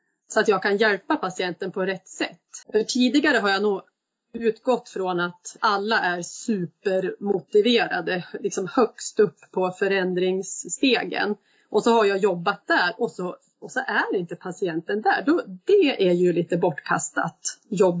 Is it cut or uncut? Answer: cut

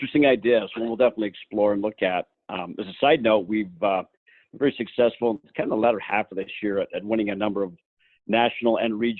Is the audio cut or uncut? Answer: uncut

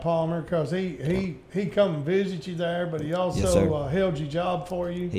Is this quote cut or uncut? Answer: uncut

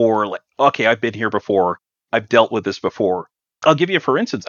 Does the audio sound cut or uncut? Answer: uncut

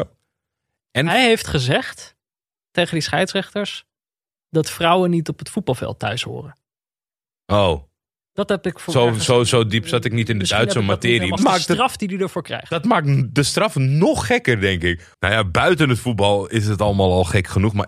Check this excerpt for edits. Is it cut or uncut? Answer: cut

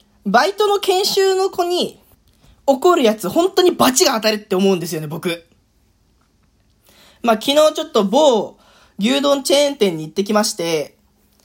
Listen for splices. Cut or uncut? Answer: uncut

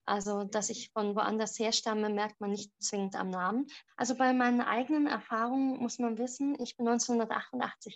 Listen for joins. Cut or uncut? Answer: cut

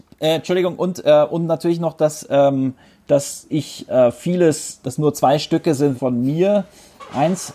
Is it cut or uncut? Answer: cut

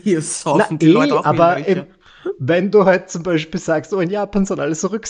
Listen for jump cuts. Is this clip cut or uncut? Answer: uncut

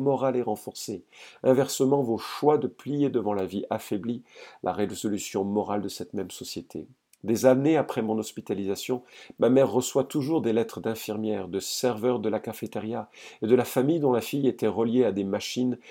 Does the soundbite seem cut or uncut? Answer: uncut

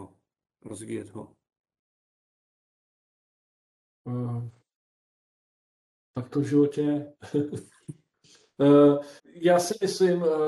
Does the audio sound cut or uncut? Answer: cut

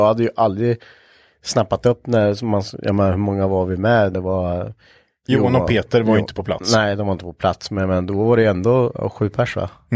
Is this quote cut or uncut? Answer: cut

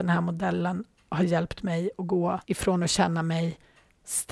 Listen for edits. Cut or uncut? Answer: cut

